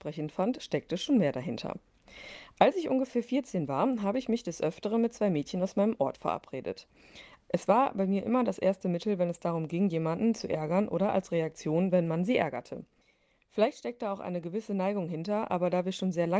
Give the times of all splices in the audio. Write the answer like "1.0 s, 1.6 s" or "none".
7.4 s